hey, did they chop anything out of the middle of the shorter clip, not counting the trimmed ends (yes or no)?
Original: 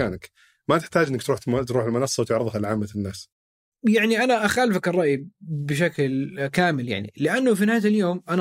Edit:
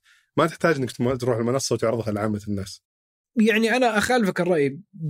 yes